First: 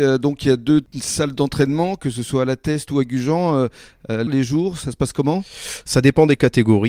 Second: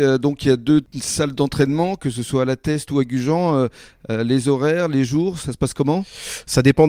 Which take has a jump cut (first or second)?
first